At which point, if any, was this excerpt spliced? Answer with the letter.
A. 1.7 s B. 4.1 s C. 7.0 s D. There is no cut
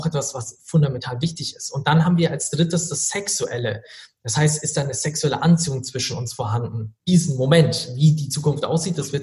C